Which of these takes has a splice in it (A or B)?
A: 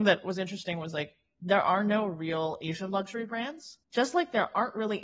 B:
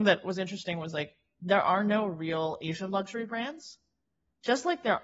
A